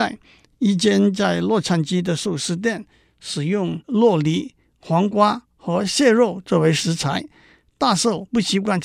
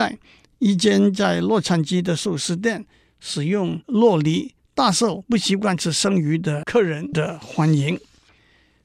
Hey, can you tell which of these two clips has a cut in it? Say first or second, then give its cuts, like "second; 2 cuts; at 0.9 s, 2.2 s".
second; 1 cut; at 4.6 s